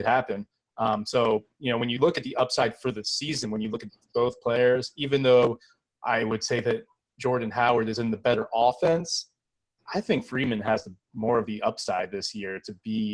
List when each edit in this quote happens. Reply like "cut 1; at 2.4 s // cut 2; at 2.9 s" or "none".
none